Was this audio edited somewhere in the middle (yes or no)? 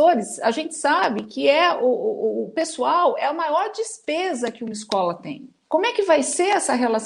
yes